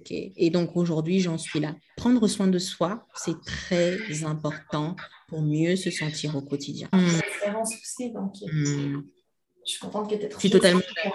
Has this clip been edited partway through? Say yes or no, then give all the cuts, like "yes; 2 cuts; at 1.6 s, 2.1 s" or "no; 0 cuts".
yes; 1 cut; at 6.9 s